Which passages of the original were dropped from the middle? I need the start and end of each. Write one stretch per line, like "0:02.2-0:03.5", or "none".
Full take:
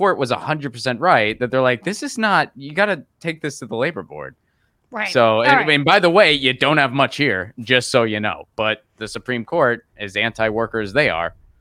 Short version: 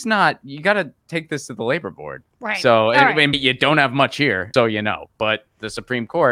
0:04.4-0:04.8
0:05.8-0:06.3
0:07.5-0:07.9